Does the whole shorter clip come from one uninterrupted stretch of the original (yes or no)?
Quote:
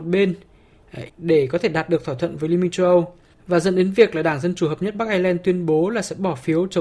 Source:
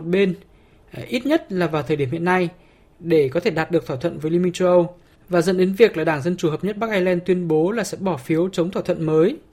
no